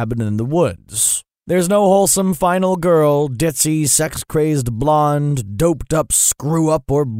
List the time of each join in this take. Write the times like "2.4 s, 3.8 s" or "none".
none